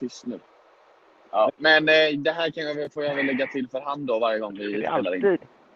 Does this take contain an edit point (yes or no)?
yes